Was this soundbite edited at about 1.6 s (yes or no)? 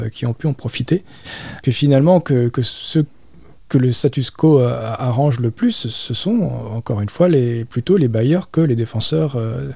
yes